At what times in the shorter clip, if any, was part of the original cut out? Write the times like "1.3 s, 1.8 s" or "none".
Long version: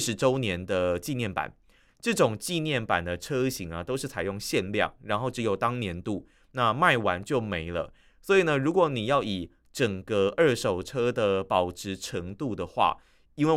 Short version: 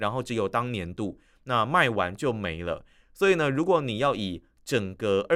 none